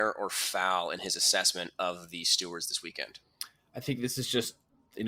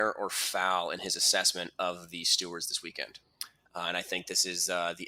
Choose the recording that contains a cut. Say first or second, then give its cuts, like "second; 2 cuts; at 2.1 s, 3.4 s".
second; 1 cut; at 3.7 s